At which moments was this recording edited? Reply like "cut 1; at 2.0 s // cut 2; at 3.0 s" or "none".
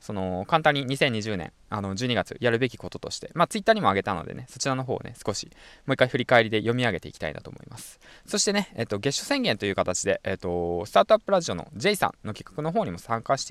none